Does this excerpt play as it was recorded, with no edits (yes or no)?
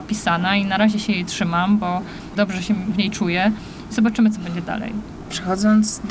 yes